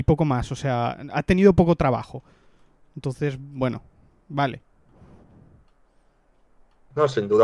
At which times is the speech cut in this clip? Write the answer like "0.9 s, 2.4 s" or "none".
none